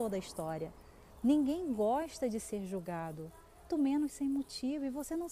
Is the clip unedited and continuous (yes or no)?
no